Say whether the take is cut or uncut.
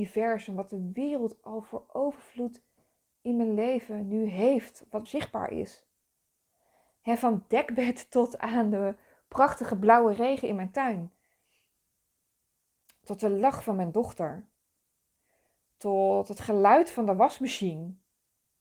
cut